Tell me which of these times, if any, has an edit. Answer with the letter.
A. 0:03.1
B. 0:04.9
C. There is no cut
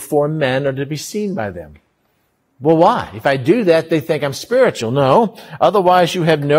C